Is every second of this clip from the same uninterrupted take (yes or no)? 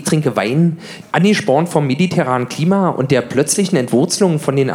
no